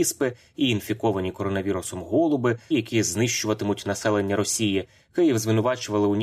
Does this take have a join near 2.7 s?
yes; 1 cut; at 2.7 s

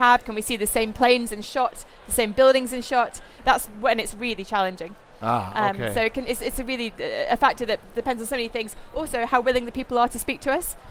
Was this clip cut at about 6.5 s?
no; 1 cut; at 3.4 s

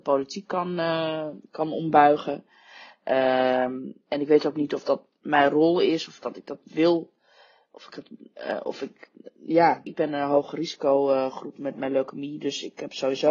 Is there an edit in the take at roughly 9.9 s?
yes; 1 cut; at 9.9 s

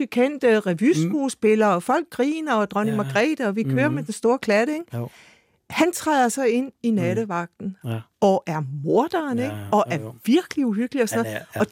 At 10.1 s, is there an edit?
no; 0 cuts

